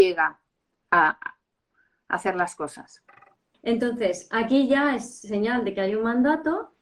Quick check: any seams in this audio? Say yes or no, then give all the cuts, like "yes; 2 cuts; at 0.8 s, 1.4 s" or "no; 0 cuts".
yes; 1 cut; at 3.5 s